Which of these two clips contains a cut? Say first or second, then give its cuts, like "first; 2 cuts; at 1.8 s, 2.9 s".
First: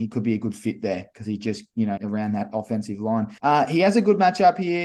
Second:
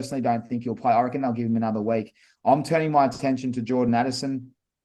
first; 2 cuts; at 2.0 s, 3.4 s